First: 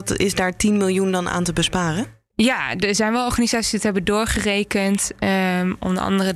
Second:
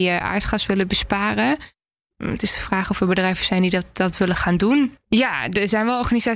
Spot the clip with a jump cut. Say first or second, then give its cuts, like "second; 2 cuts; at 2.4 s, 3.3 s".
second; 1 cut; at 5.0 s